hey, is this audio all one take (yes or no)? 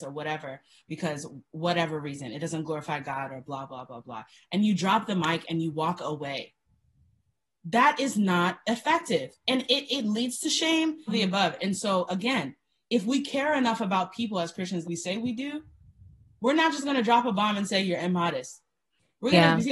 no